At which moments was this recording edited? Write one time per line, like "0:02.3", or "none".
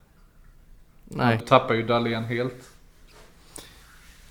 0:01.4